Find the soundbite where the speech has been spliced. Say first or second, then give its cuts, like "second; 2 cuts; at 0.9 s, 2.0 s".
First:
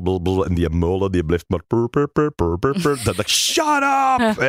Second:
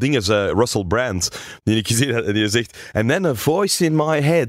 first; 1 cut; at 3.2 s